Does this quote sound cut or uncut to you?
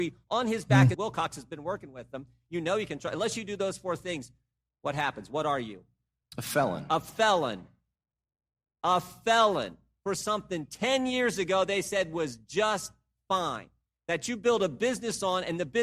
cut